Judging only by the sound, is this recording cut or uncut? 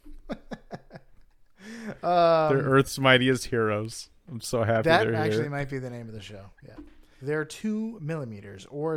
cut